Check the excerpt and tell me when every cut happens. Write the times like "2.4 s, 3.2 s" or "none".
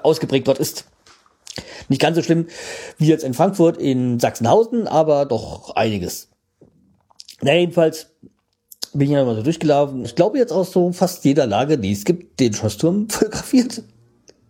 10.0 s